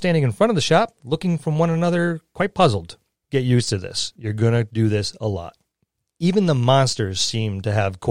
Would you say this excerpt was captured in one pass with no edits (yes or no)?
no